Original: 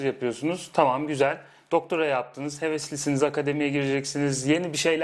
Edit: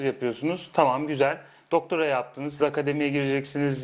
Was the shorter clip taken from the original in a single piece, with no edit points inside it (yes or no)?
no